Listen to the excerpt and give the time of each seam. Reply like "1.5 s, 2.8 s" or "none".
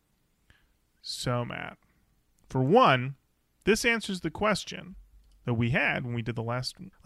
none